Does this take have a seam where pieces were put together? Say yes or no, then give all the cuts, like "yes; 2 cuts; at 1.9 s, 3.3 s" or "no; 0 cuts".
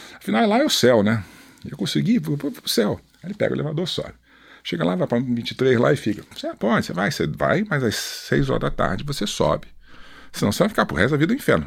yes; 1 cut; at 6.3 s